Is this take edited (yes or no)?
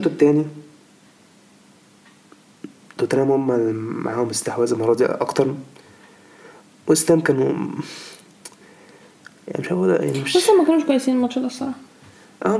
no